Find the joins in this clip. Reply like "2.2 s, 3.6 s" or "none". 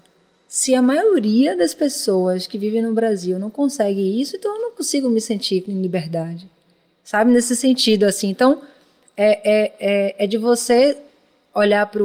none